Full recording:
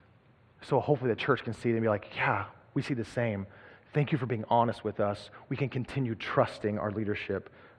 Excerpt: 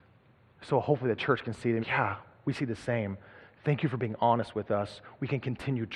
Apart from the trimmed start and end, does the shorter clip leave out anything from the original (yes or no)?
yes